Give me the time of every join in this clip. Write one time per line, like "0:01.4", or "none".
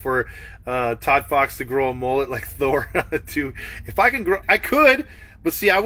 0:04.4